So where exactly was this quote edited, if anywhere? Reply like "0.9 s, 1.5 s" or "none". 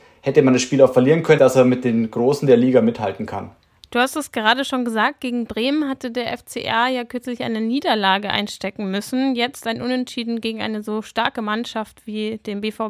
1.4 s